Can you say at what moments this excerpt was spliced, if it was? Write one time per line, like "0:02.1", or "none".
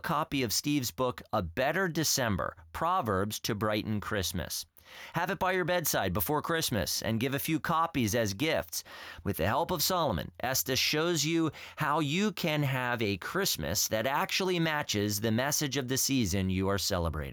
0:09.2